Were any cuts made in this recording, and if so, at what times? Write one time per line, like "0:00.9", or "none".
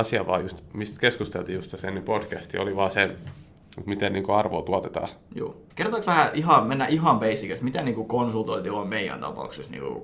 0:05.7